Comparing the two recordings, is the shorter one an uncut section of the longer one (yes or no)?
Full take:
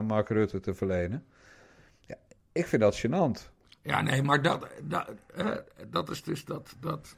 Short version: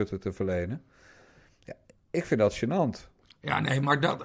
yes